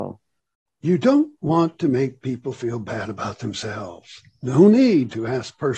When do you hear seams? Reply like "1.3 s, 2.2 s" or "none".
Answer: none